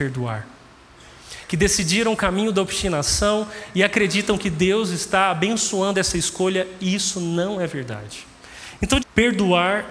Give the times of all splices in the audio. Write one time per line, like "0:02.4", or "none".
0:09.0